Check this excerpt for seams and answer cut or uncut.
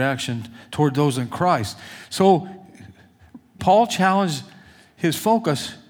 cut